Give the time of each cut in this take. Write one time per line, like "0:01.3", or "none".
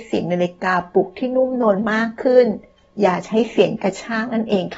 none